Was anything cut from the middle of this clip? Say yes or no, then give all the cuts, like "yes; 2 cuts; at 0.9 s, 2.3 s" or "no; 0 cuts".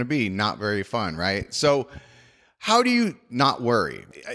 no; 0 cuts